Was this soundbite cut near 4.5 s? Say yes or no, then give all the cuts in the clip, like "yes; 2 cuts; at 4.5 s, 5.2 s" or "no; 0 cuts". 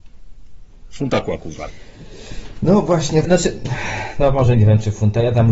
yes; 2 cuts; at 3.2 s, 4.5 s